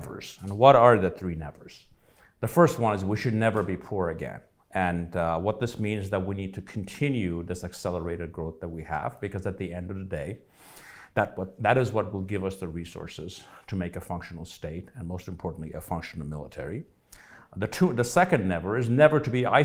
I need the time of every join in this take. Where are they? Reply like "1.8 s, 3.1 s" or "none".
none